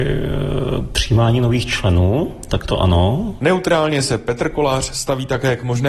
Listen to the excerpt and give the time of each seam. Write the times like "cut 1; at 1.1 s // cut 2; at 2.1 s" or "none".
cut 1; at 3.4 s